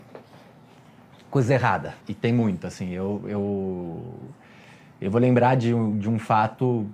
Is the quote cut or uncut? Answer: cut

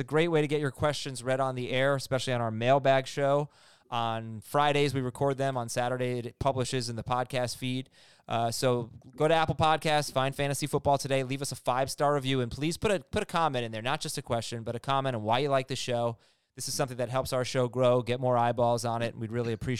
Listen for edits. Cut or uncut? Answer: uncut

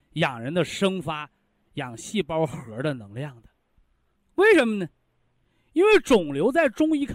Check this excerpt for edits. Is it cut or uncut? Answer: cut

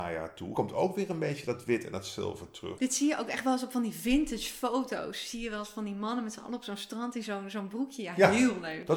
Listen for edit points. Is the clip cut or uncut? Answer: cut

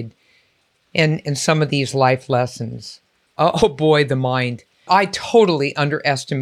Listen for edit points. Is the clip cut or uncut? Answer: cut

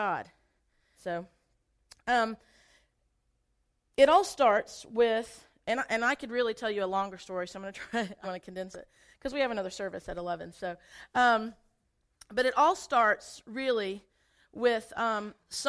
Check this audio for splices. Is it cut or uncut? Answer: cut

